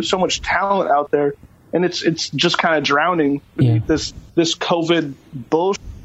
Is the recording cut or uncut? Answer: cut